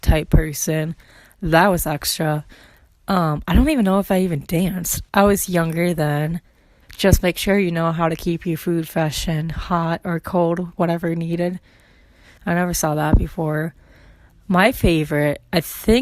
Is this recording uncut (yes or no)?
no